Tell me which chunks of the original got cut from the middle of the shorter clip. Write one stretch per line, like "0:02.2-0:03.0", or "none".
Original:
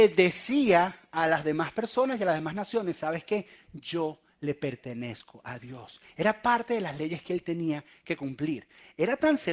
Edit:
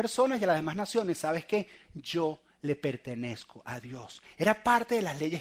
none